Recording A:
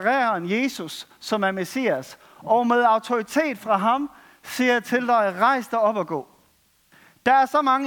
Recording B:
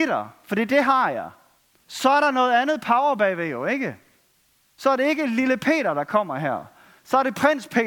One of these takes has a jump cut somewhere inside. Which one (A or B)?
B